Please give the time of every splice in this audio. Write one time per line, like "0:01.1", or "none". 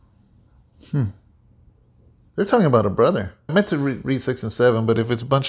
0:02.3
0:03.5